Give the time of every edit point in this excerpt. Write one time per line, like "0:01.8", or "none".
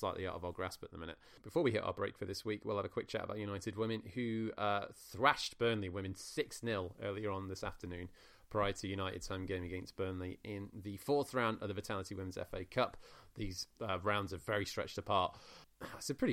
0:13.3